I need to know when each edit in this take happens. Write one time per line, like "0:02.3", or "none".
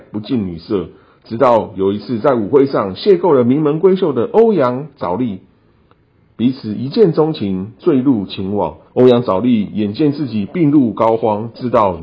0:08.9